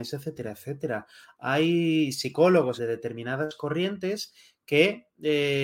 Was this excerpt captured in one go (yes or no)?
no